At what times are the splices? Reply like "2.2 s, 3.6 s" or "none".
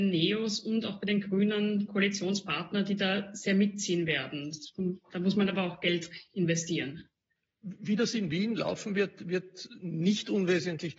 none